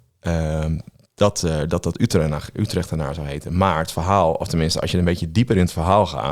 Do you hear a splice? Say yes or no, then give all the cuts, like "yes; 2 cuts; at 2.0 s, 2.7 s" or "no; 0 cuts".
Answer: no; 0 cuts